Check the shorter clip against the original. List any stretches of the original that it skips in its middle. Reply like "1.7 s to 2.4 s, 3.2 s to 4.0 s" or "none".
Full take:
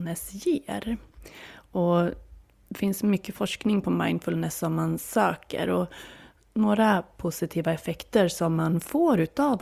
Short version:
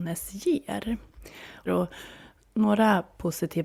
1.7 s to 5.7 s